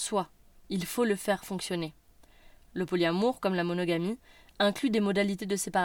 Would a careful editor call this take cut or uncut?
uncut